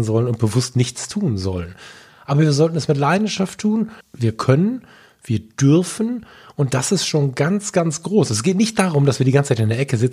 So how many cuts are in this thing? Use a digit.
2